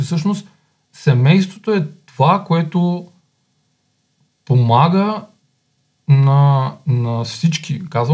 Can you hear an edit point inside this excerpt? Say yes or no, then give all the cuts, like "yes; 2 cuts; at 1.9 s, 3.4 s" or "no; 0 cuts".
no; 0 cuts